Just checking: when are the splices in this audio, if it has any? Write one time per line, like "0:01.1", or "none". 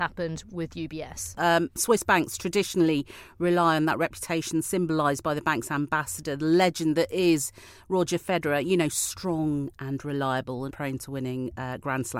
0:01.4
0:10.7